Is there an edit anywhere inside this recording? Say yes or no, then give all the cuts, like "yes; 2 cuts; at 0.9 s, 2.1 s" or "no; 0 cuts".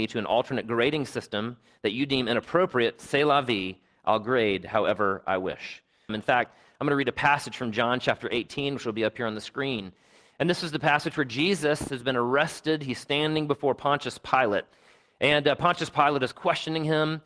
yes; 1 cut; at 6.1 s